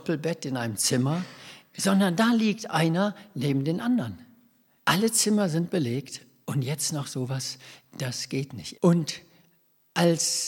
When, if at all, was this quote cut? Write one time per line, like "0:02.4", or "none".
0:04.8
0:08.7